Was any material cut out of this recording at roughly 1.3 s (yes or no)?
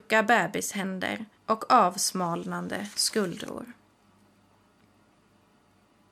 yes